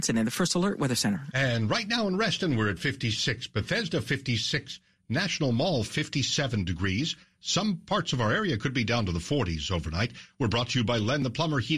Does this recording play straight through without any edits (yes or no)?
yes